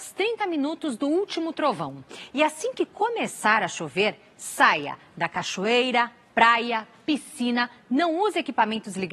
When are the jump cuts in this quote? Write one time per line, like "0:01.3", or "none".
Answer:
none